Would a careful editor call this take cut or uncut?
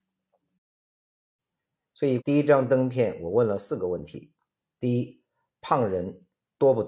cut